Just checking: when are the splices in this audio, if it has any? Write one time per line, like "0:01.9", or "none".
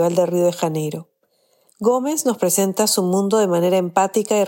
0:01.7